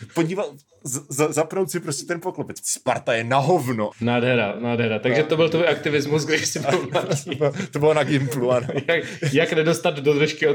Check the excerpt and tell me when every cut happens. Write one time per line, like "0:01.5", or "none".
0:02.6
0:03.9